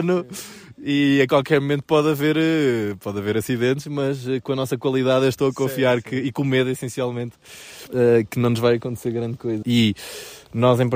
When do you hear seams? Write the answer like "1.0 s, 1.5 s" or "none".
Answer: 7.9 s, 9.6 s

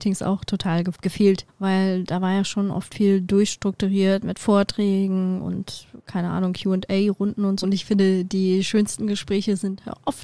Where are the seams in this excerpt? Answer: 1.5 s, 7.6 s

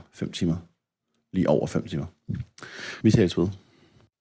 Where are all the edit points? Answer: 3.0 s

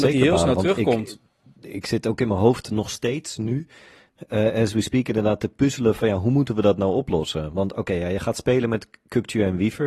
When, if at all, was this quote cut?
none

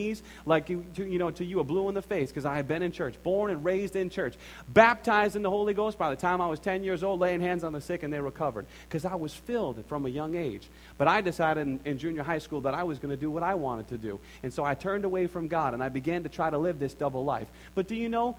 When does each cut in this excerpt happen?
none

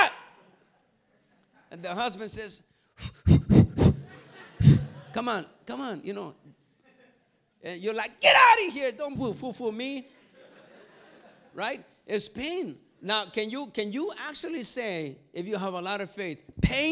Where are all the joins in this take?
9.2 s

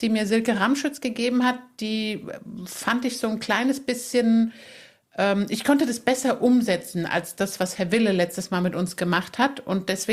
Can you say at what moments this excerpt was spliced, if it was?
none

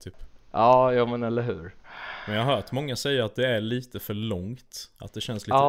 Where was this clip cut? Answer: none

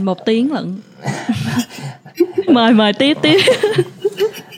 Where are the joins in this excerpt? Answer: 2.5 s

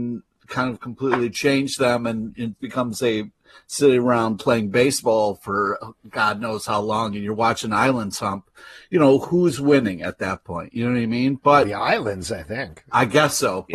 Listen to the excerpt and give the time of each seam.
2.6 s

